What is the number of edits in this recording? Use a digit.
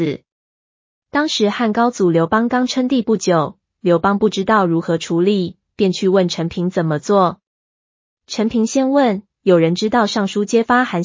1